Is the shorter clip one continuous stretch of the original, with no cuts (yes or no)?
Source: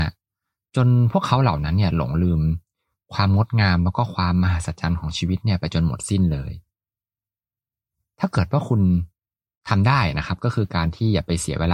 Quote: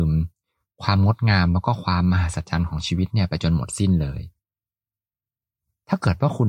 yes